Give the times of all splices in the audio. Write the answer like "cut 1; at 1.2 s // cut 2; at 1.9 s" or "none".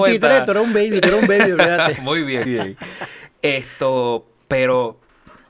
cut 1; at 2.5 s